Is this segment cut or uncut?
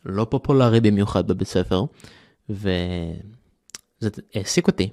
uncut